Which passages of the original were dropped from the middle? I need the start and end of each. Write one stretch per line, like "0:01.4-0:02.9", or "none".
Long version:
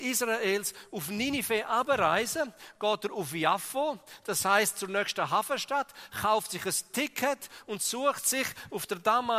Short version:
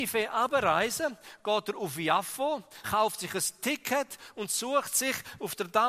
0:04.2-0:06.1

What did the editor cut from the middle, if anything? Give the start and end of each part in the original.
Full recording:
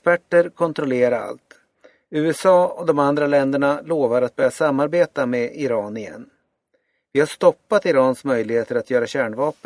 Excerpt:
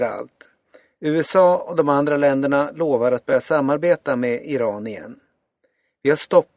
none

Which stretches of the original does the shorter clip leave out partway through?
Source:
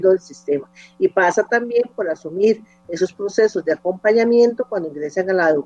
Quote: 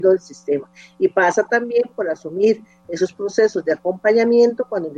none

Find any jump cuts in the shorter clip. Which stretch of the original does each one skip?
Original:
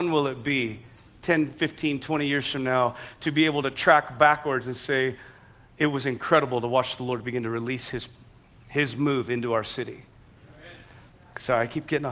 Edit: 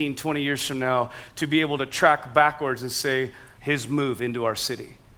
0:05.4-0:08.6

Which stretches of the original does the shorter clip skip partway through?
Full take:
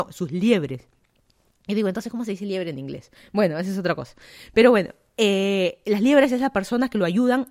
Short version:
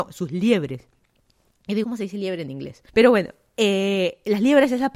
0:01.8-0:02.1
0:03.2-0:04.5

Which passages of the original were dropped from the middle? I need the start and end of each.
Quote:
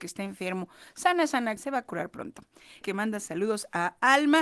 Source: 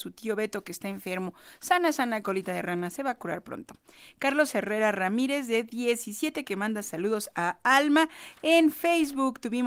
0:02.2-0:02.9
0:04.1-0:06.4

